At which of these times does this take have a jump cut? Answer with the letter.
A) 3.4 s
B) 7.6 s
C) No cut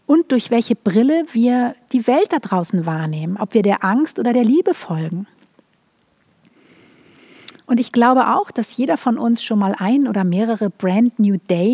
A